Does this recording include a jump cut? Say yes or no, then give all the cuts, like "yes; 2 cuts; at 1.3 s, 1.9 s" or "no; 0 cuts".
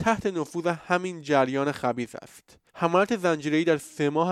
yes; 1 cut; at 2.7 s